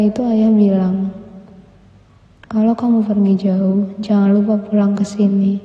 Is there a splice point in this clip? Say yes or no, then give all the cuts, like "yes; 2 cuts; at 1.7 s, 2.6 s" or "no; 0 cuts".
no; 0 cuts